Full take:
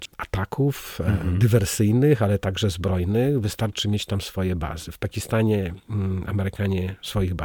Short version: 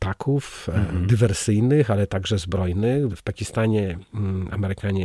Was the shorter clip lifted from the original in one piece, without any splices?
no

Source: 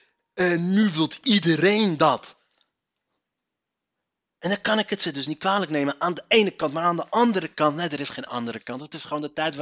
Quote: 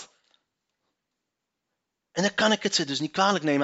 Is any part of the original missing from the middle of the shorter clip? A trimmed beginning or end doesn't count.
no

